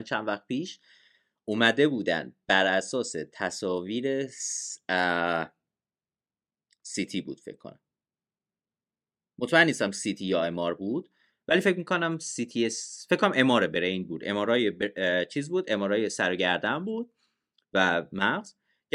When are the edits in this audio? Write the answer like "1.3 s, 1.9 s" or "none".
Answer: none